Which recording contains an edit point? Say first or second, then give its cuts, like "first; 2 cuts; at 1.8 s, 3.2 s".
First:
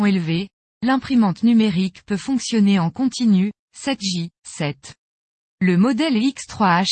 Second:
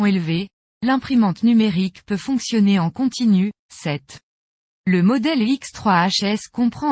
second; 1 cut; at 3.6 s